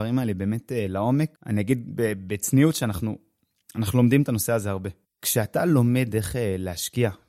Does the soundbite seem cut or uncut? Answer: cut